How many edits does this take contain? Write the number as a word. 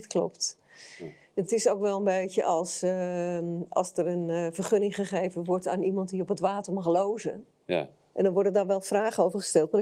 two